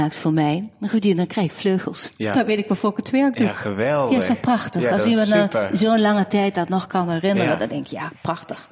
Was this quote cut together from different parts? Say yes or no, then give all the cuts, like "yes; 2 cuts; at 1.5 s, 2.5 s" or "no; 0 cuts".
no; 0 cuts